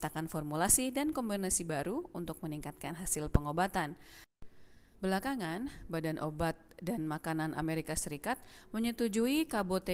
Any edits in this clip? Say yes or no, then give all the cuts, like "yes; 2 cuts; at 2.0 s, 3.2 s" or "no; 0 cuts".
yes; 1 cut; at 4.9 s